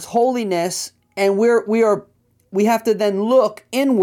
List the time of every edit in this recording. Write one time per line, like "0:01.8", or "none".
none